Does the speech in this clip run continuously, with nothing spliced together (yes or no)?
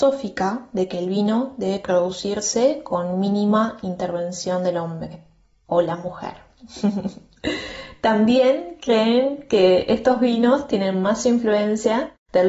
yes